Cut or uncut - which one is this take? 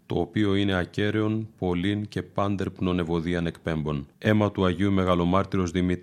cut